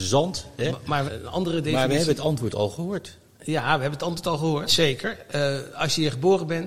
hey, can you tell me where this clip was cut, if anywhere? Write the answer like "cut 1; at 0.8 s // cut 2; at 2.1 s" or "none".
cut 1; at 1.1 s // cut 2; at 4.7 s